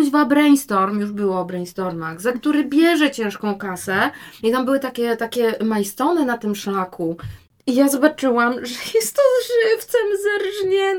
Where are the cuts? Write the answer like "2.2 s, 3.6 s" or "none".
4.4 s